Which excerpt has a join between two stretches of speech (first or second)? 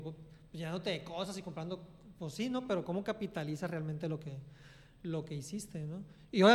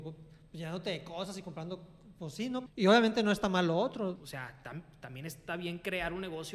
second